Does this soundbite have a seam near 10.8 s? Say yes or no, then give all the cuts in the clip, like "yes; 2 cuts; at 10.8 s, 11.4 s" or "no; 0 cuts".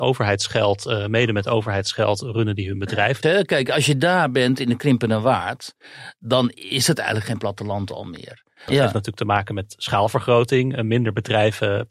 no; 2 cuts; at 3.2 s, 8.7 s